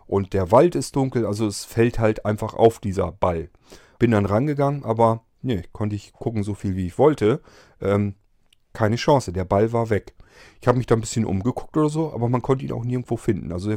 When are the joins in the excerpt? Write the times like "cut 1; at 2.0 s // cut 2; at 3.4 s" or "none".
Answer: cut 1; at 4.0 s